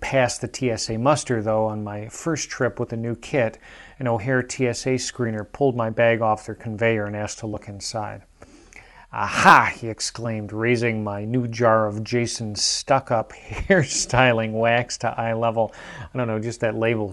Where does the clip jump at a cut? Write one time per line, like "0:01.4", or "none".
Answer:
none